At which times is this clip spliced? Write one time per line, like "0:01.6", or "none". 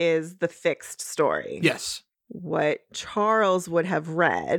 none